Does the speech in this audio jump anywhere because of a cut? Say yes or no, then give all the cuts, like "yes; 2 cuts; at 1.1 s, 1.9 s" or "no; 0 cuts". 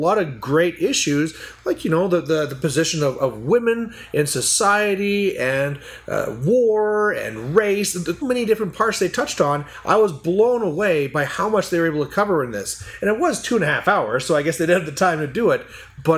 yes; 1 cut; at 8.2 s